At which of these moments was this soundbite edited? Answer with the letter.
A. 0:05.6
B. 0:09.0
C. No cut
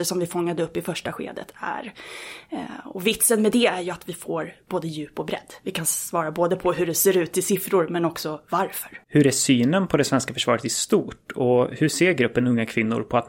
B